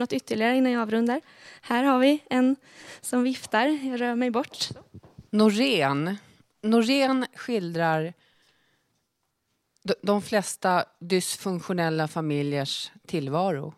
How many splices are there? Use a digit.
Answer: 1